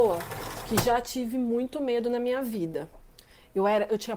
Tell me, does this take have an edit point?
no; 0 cuts

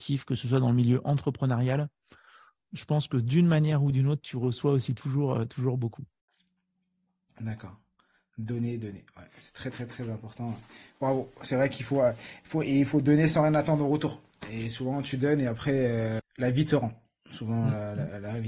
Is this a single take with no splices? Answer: no; 1 cut; at 16.2 s

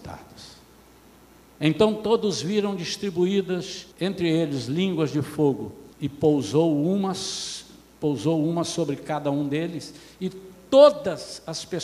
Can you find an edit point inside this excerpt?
yes; 2 cuts; at 3.9 s, 5.9 s

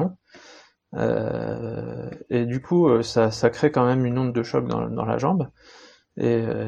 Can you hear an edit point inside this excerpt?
no; 0 cuts

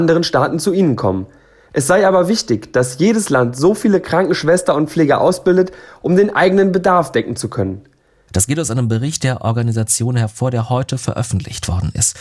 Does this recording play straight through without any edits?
no; 1 cut; at 8.3 s

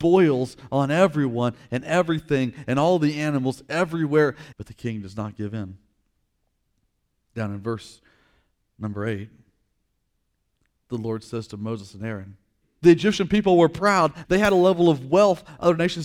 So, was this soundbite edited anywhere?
yes; 3 cuts; at 4.5 s, 12.6 s, 14.2 s

